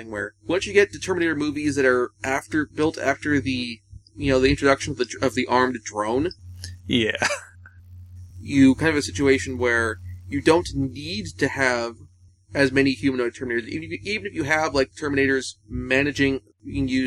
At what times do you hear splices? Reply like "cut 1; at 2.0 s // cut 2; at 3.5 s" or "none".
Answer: none